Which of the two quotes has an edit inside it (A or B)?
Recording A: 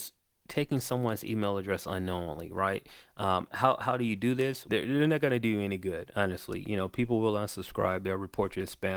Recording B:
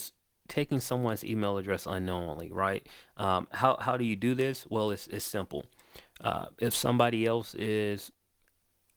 A